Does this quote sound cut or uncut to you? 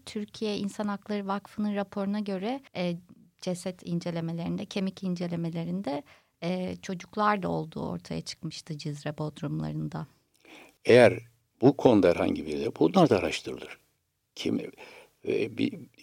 cut